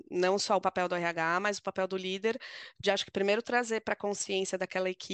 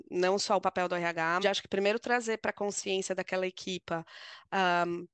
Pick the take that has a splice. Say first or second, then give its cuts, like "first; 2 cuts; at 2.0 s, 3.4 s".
second; 1 cut; at 1.4 s